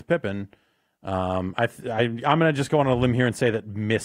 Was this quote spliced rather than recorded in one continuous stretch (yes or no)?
no